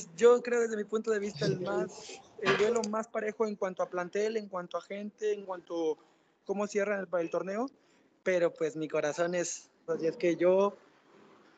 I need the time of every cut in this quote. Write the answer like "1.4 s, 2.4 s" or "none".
9.9 s